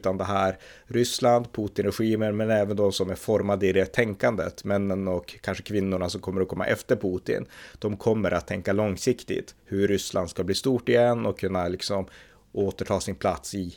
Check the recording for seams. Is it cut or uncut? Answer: uncut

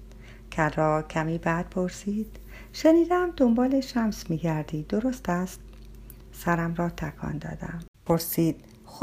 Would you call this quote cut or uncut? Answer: cut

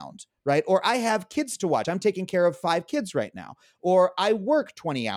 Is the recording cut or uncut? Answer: uncut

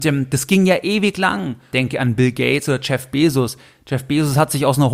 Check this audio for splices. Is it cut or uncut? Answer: cut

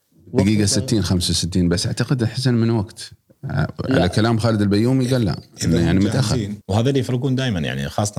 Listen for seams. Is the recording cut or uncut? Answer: cut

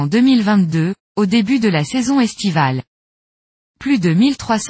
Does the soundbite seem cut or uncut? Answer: uncut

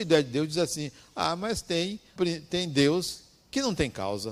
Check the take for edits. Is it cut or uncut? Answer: cut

